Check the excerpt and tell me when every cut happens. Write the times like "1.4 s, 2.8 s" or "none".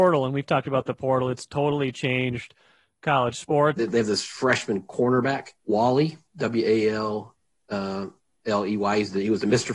3.8 s, 5.6 s